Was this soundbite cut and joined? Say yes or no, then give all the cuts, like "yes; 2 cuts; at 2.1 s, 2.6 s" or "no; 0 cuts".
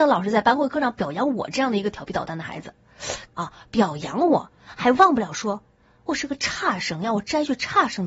yes; 1 cut; at 3.3 s